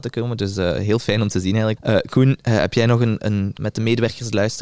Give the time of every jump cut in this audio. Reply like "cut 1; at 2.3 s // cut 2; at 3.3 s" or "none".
cut 1; at 1.8 s // cut 2; at 3.6 s